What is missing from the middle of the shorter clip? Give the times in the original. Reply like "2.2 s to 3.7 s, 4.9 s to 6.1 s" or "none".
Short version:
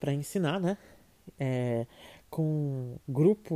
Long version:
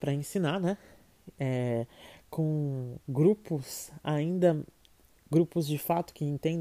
none